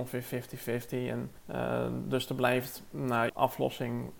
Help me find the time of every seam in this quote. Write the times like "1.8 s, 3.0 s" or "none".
1.4 s, 3.3 s